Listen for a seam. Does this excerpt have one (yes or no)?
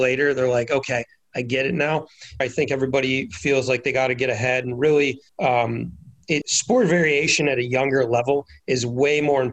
yes